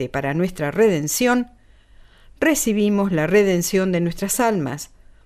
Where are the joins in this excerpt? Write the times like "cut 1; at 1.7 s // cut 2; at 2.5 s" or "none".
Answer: none